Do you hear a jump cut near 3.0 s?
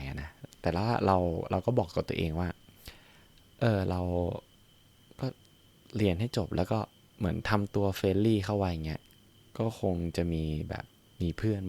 no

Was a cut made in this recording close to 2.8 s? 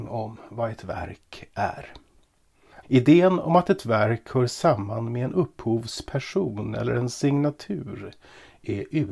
yes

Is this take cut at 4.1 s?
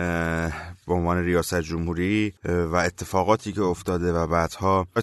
no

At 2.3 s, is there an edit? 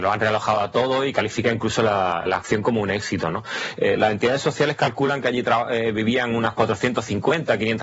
yes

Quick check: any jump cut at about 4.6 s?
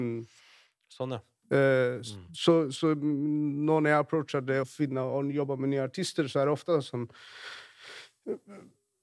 yes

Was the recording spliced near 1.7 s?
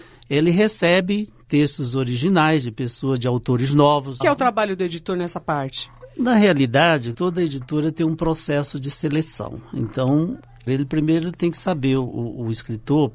no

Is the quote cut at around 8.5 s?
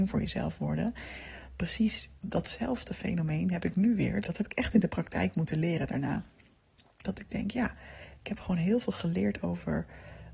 no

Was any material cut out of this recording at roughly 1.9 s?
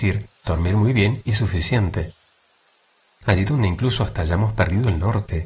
no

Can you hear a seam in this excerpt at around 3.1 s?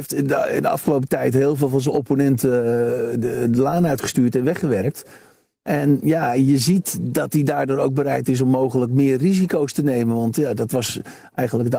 no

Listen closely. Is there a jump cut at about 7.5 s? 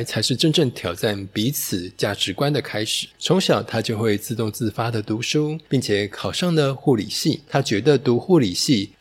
yes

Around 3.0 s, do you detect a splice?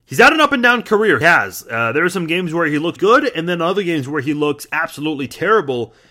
yes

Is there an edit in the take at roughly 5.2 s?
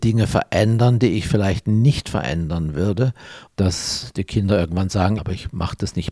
yes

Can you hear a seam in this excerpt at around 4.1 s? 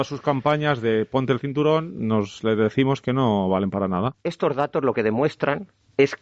yes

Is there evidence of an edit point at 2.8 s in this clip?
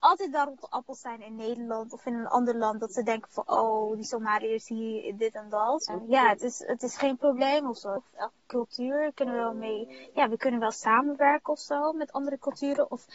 no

